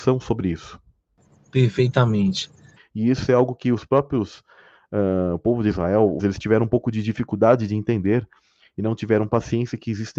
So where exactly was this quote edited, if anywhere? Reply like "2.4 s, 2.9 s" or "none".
2.8 s, 6.2 s